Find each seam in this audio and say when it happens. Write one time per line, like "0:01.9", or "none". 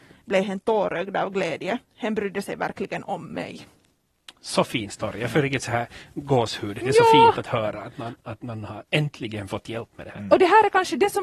none